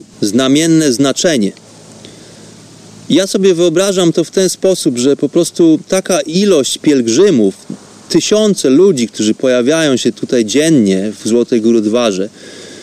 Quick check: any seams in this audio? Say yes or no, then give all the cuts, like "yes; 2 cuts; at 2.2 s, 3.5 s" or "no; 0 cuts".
no; 0 cuts